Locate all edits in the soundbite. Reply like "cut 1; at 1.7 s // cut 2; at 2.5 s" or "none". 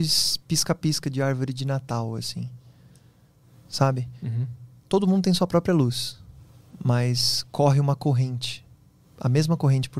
none

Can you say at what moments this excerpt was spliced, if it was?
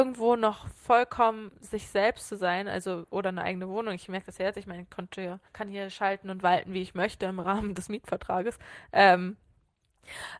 cut 1; at 5.5 s

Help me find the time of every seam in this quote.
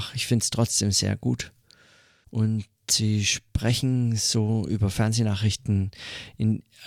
cut 1; at 2.2 s

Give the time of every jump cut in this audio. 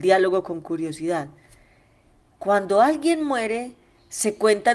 cut 1; at 2.4 s

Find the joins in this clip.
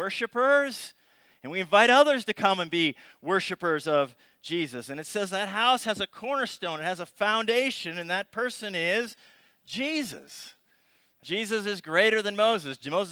cut 1; at 11.2 s

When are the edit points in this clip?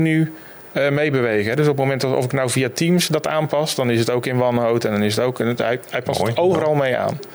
none

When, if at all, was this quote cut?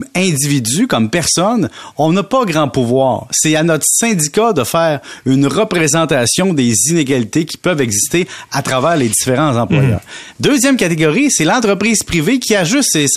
none

